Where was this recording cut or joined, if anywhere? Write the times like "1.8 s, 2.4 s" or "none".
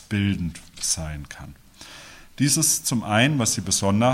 none